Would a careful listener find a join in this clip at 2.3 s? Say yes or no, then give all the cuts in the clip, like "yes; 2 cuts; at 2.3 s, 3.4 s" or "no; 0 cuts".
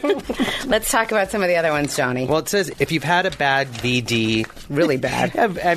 no; 1 cut; at 4.7 s